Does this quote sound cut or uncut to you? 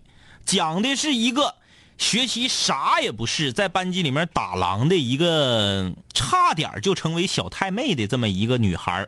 cut